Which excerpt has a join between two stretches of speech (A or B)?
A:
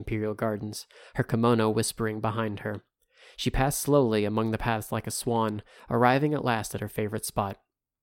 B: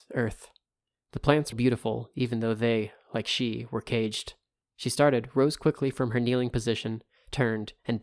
B